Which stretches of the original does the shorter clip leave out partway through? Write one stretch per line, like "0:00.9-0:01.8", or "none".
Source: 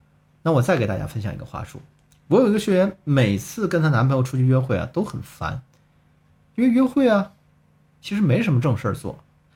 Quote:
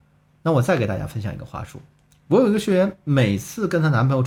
none